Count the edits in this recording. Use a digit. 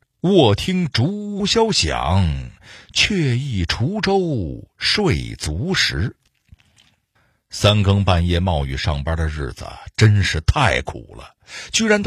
1